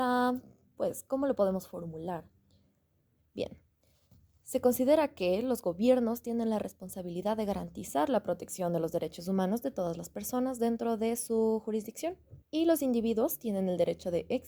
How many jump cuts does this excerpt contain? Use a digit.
2